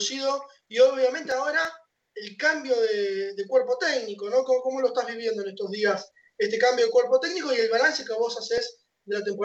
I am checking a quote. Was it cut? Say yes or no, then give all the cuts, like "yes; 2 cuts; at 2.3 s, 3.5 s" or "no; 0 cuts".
no; 0 cuts